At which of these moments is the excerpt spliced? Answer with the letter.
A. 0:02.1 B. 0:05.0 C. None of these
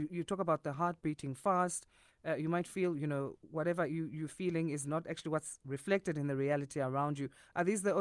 A